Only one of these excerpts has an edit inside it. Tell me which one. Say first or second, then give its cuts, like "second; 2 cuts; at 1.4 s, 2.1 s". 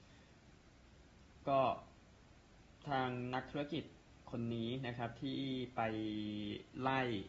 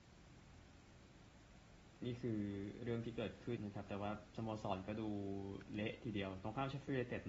second; 1 cut; at 3.6 s